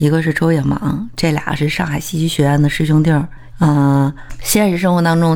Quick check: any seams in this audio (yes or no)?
yes